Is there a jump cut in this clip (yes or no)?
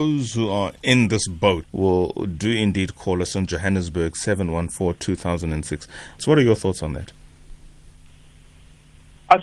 yes